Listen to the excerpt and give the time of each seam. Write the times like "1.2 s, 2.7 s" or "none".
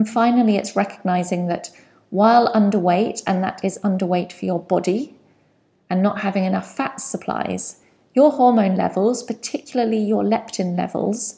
none